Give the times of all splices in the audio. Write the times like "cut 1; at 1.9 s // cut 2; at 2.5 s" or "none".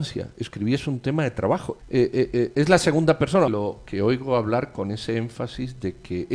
cut 1; at 1.8 s // cut 2; at 3.5 s